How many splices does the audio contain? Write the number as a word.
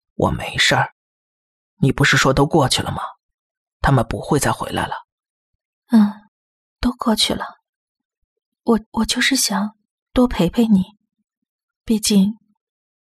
one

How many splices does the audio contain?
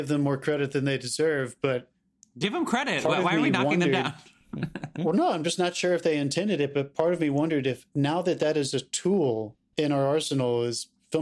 zero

